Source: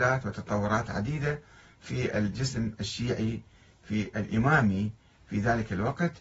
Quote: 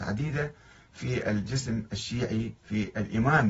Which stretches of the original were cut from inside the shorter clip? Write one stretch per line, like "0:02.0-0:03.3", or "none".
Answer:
0:03.5-0:03.8